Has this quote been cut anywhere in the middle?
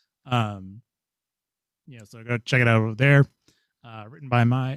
no; 0 cuts

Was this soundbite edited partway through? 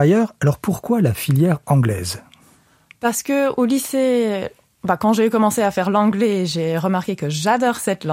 no; 0 cuts

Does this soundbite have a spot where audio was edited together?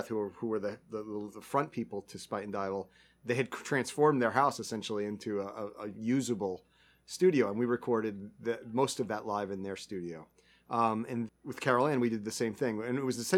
yes; 1 cut; at 11.3 s

